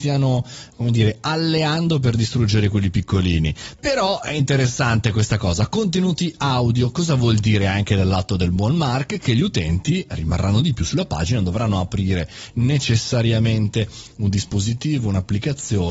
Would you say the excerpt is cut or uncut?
uncut